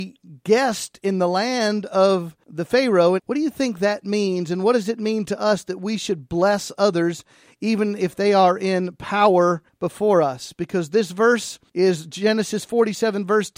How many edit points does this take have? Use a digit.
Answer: 1